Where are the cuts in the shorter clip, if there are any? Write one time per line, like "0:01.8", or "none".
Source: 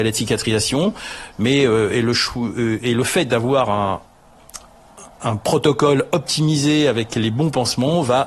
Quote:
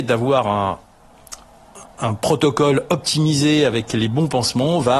none